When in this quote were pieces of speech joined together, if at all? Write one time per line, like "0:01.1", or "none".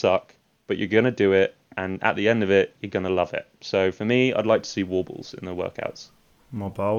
none